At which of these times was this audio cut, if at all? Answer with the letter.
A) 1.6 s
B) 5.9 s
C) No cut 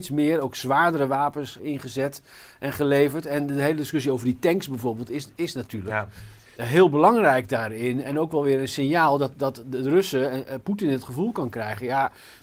A